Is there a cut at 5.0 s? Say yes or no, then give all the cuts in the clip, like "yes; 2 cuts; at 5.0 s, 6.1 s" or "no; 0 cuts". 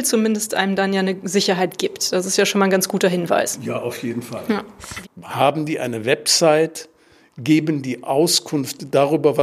yes; 1 cut; at 5.0 s